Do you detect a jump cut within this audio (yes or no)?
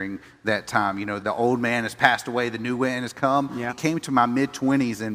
yes